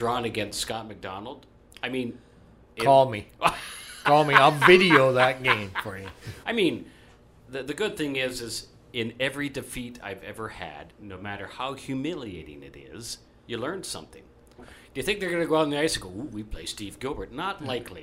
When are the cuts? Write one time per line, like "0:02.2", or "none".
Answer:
0:06.4
0:14.6